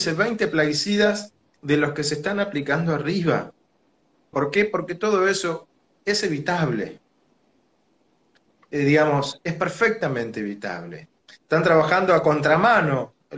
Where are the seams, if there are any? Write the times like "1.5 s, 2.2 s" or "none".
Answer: 4.3 s, 11.2 s